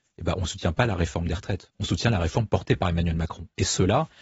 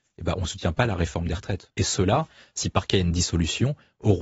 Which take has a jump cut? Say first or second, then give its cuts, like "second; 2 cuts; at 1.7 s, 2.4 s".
second; 1 cut; at 1.7 s